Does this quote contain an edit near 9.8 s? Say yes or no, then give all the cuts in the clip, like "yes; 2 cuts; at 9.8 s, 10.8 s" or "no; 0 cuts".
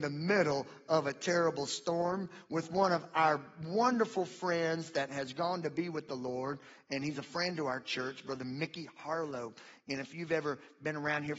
no; 0 cuts